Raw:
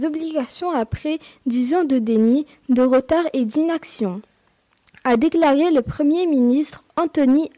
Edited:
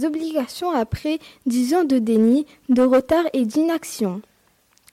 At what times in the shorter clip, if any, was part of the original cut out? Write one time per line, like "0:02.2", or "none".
none